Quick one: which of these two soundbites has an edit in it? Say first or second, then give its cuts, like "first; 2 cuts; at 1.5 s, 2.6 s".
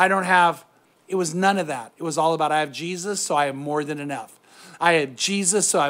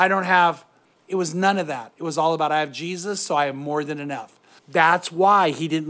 second; 1 cut; at 4.6 s